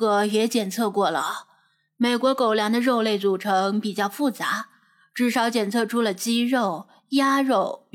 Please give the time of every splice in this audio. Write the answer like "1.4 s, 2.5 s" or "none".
none